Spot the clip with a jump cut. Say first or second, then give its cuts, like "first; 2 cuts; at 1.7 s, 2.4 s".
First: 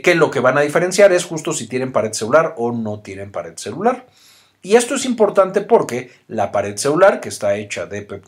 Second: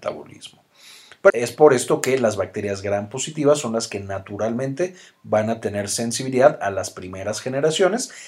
second; 1 cut; at 1.3 s